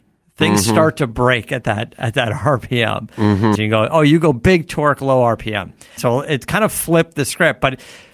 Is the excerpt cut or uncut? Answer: cut